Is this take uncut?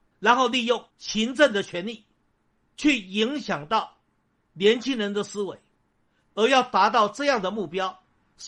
no; 2 cuts; at 0.9 s, 6.3 s

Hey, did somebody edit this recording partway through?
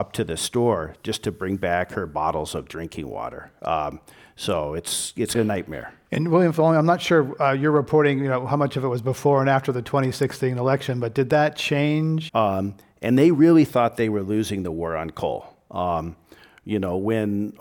yes; 3 cuts; at 5.3 s, 12.3 s, 15.7 s

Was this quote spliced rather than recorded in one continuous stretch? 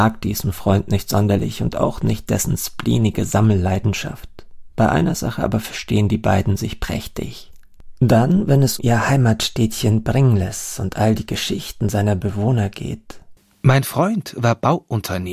yes; 1 cut; at 8.8 s

